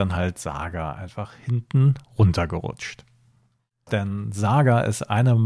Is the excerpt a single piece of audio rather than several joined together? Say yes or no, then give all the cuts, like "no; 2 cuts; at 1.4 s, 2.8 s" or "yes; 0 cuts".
no; 1 cut; at 3.9 s